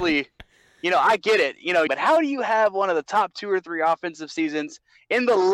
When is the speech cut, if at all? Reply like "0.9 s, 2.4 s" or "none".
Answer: 1.9 s